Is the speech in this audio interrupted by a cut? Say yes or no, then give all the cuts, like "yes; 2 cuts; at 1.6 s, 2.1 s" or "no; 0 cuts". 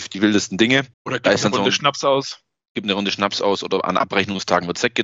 yes; 1 cut; at 0.9 s